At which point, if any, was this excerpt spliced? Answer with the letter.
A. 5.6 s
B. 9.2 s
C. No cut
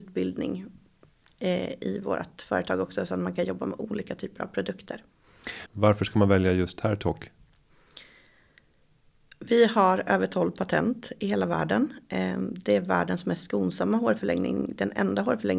A